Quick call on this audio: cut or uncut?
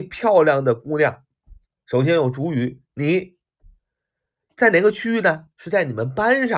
uncut